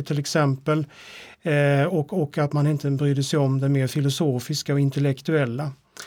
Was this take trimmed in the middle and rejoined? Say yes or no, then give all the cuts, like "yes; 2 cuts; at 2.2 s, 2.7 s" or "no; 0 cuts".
no; 0 cuts